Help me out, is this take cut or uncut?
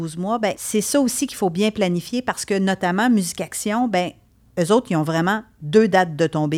uncut